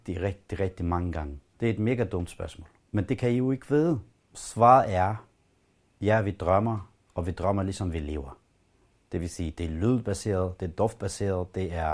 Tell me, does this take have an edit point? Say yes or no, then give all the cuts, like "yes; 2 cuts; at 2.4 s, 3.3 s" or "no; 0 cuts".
no; 0 cuts